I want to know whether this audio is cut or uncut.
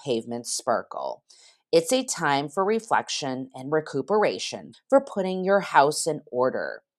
cut